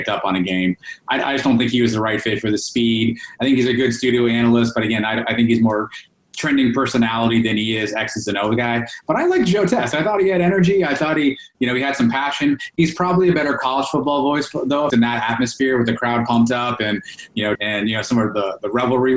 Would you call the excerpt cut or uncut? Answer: cut